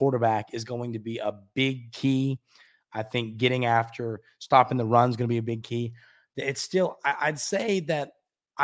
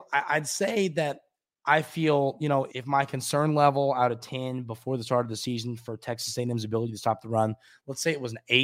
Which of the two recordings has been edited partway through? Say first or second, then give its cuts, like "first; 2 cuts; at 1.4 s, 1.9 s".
second; 1 cut; at 2.7 s